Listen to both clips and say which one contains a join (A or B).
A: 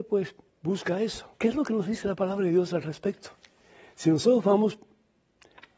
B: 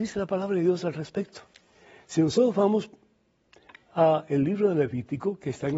A